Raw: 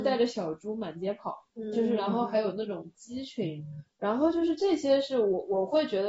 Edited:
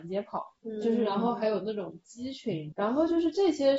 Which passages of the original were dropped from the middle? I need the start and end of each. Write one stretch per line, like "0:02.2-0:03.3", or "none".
0:03.6-0:04.0